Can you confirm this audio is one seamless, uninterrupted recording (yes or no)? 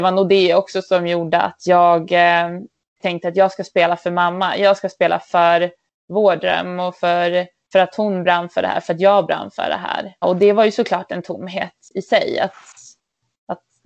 no